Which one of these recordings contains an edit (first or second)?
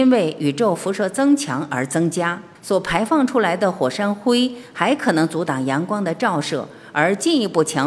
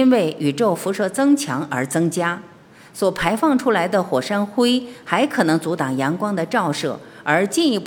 first